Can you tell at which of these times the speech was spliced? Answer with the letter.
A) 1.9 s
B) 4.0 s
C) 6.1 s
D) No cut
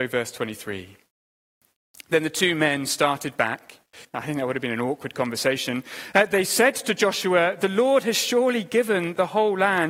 B